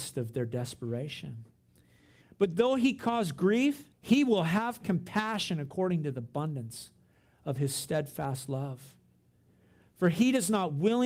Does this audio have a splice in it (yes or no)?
yes